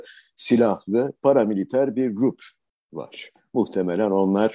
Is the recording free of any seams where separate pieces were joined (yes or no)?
yes